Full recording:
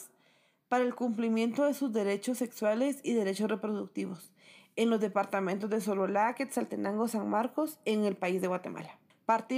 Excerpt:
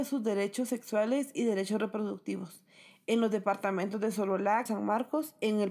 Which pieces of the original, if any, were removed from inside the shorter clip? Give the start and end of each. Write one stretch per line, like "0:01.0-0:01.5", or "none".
0:06.3-0:07.1